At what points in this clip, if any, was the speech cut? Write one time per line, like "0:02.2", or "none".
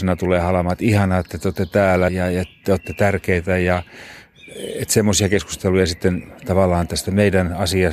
0:02.1